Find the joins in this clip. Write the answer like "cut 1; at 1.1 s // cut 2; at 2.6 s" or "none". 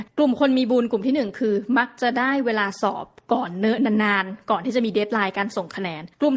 none